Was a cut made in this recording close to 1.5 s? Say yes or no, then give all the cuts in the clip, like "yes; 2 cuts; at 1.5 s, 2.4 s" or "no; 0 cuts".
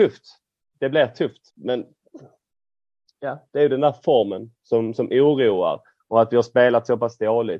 yes; 1 cut; at 1.5 s